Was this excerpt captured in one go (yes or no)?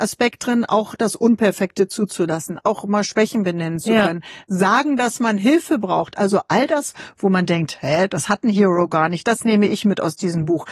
yes